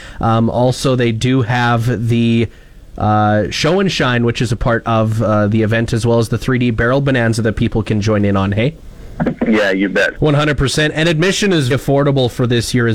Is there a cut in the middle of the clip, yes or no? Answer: yes